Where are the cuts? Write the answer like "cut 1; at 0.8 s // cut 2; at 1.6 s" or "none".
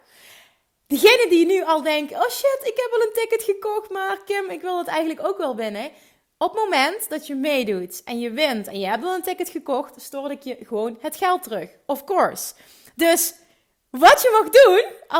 none

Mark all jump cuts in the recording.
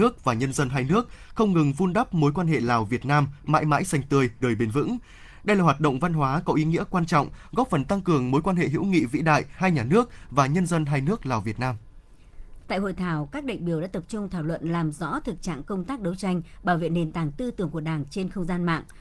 cut 1; at 4.4 s // cut 2; at 9.6 s // cut 3; at 12.6 s

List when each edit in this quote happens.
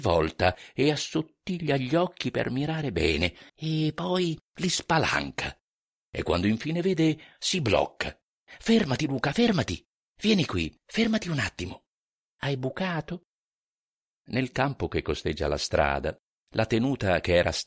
cut 1; at 3.5 s // cut 2; at 10.1 s

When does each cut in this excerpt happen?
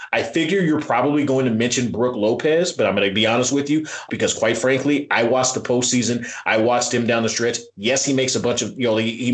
cut 1; at 4.1 s

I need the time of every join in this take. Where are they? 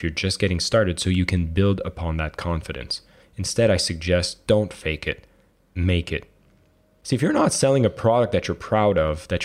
cut 1; at 3.2 s

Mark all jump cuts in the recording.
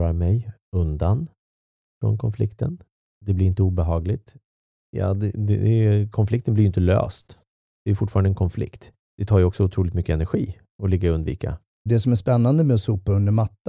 cut 1; at 4.7 s // cut 2; at 11.9 s

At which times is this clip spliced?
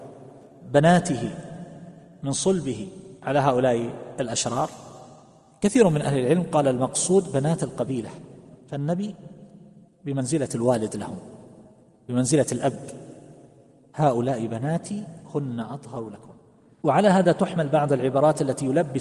none

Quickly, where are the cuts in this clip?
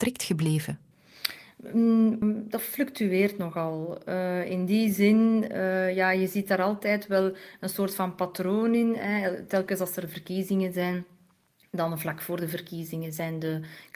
cut 1; at 2.2 s

